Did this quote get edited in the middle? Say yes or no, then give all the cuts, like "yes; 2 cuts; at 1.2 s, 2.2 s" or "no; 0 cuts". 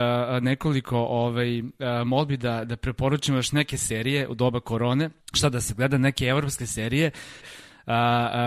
yes; 2 cuts; at 5.2 s, 7.4 s